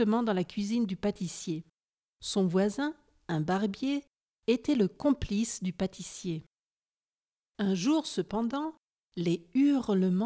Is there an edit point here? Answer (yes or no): yes